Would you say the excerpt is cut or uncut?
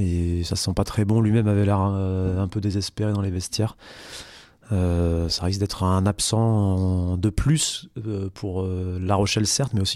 uncut